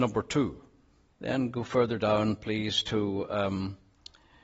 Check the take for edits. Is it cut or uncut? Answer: cut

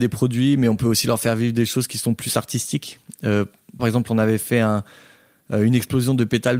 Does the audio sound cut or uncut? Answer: cut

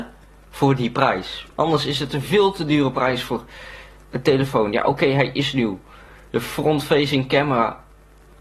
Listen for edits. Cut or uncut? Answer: uncut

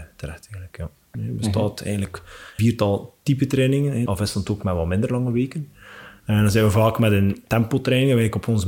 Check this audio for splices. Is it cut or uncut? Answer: cut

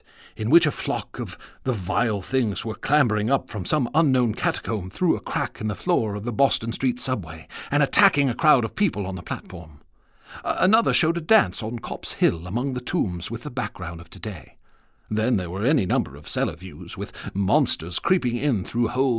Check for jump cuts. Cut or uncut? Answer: uncut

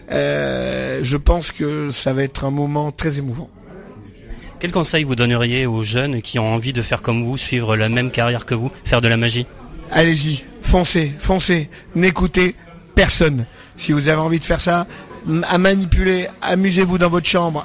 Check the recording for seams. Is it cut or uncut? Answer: uncut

